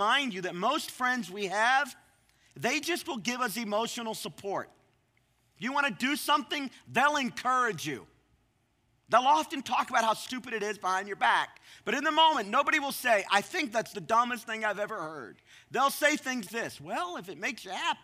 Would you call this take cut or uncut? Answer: cut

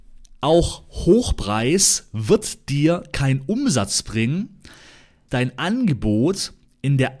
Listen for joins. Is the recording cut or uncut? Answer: cut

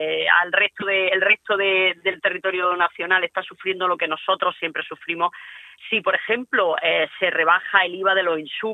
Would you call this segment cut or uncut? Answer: cut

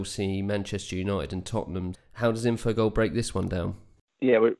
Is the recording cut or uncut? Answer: cut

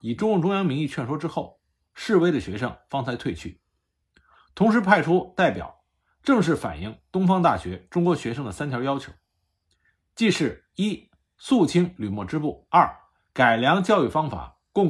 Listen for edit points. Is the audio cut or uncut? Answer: uncut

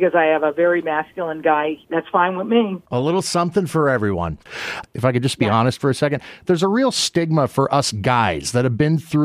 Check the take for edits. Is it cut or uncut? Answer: cut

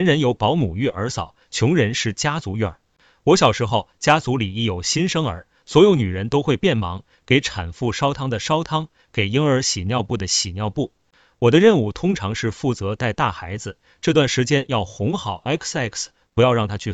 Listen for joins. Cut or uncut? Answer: uncut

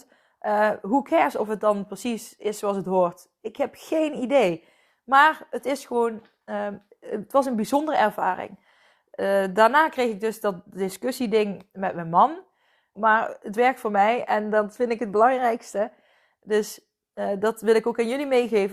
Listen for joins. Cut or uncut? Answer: cut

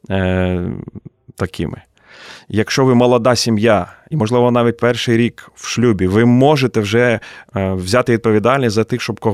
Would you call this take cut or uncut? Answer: uncut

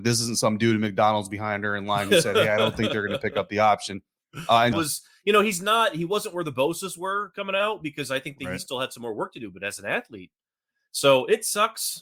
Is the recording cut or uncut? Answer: cut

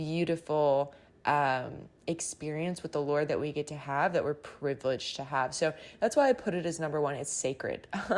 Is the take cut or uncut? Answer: uncut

